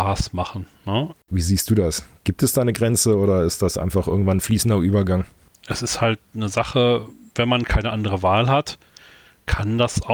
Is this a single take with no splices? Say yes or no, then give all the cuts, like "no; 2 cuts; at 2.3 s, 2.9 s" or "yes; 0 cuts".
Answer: no; 2 cuts; at 1.2 s, 5.5 s